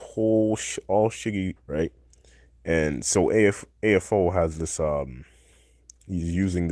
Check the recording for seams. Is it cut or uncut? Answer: cut